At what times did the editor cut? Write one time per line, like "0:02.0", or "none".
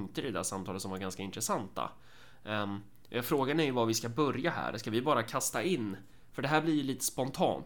none